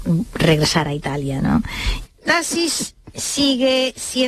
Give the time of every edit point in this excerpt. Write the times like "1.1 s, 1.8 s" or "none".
2.1 s